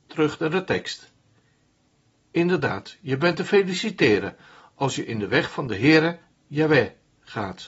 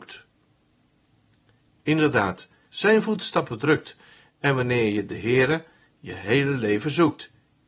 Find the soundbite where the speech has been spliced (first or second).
second